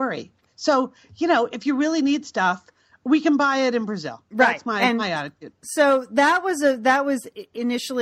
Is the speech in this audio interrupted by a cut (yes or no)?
no